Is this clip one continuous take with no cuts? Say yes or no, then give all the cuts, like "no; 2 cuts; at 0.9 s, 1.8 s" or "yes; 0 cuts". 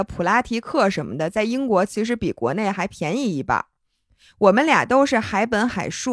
yes; 0 cuts